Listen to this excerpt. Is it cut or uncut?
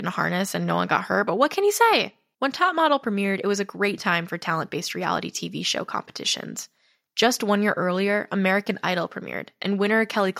cut